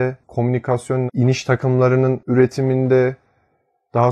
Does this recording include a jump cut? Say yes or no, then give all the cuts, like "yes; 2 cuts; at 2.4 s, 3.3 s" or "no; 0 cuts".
yes; 1 cut; at 1.1 s